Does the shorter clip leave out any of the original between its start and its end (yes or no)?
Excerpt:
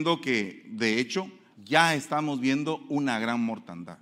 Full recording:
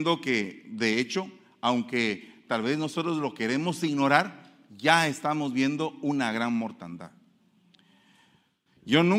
yes